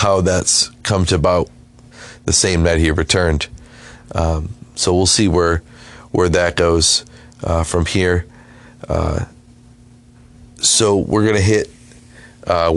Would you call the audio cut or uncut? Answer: uncut